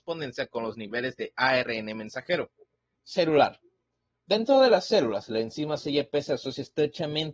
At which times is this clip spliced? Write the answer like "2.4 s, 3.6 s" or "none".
2.9 s